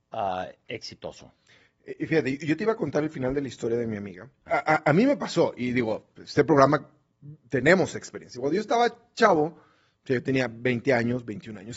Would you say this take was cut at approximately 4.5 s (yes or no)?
yes